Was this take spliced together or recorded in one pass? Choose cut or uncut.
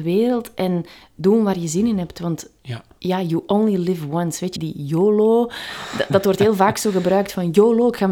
cut